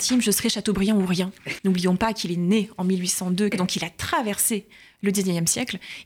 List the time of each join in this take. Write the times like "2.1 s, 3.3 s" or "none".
1.6 s, 3.5 s